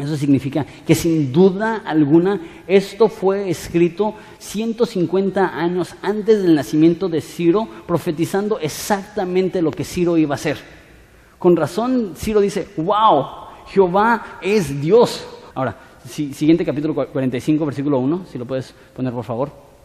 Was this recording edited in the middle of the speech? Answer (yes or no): yes